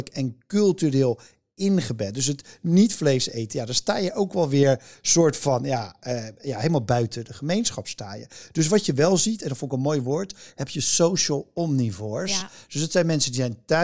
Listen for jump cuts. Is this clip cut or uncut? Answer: uncut